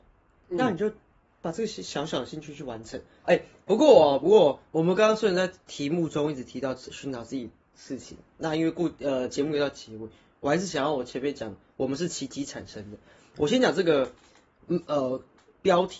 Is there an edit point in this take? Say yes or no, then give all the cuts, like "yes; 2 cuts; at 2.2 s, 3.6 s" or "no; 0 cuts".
yes; 1 cut; at 3.2 s